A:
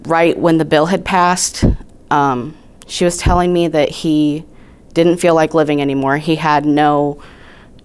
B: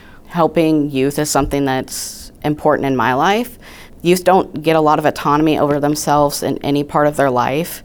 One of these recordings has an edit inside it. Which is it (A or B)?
B